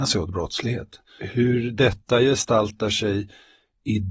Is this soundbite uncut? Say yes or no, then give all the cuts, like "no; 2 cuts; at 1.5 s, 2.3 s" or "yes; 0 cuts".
no; 1 cut; at 1.2 s